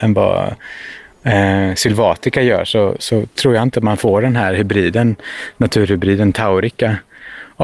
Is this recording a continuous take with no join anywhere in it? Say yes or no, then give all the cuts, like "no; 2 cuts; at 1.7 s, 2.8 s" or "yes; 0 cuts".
yes; 0 cuts